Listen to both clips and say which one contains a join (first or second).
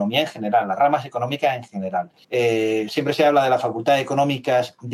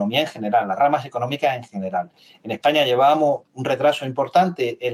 first